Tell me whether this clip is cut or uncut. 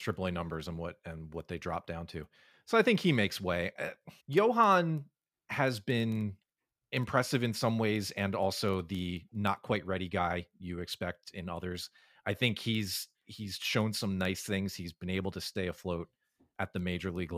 cut